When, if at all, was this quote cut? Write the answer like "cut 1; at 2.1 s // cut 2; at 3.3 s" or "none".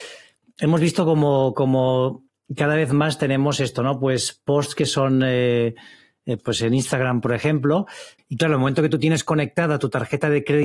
cut 1; at 6.4 s // cut 2; at 8.2 s